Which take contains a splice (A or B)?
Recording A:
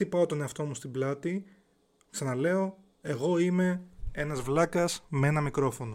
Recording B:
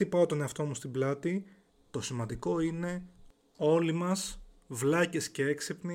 B